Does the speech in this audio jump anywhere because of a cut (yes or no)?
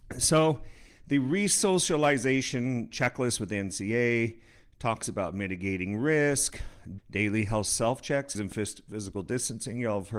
yes